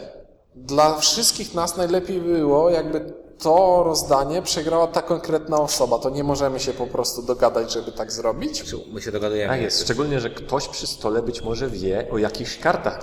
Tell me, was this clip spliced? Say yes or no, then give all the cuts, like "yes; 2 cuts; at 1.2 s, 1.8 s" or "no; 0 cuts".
no; 0 cuts